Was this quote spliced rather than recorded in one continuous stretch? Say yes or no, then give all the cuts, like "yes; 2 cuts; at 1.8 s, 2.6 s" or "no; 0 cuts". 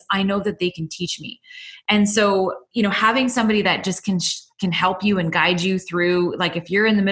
no; 0 cuts